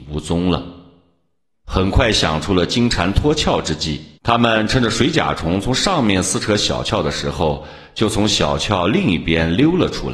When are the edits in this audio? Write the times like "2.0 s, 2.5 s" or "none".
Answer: 1.5 s, 4.2 s